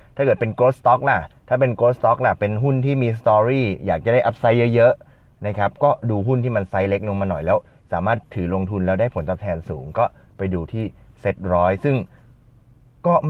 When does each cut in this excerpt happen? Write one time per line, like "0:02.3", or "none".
none